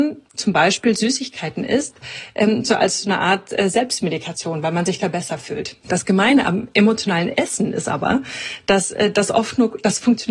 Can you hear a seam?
no; 0 cuts

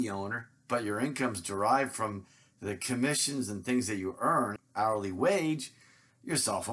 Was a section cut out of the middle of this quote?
yes; 1 cut; at 4.6 s

